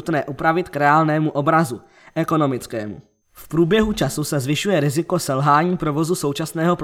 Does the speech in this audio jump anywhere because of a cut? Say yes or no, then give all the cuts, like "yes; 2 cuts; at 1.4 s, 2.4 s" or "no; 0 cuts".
yes; 1 cut; at 3.2 s